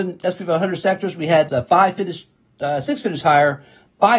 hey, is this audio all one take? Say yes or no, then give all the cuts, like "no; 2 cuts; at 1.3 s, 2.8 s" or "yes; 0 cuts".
no; 1 cut; at 1.5 s